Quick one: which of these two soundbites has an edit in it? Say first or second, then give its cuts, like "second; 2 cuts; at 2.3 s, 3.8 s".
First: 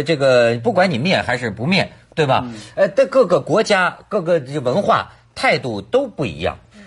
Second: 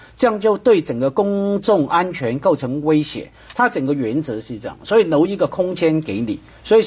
first; 1 cut; at 2.1 s